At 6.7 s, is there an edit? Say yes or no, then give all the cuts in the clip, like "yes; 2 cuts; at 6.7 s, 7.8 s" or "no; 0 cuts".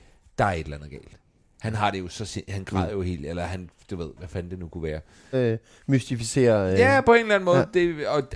no; 1 cut; at 5.3 s